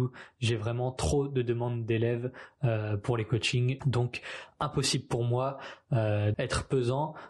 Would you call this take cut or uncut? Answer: cut